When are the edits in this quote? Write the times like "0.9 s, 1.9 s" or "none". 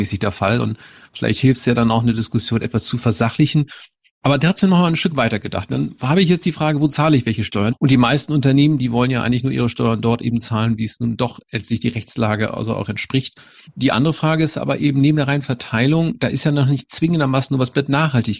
7.7 s, 13.7 s